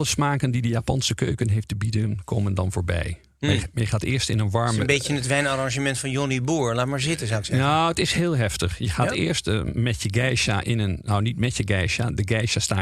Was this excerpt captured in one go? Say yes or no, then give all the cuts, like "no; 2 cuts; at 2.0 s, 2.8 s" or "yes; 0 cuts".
yes; 0 cuts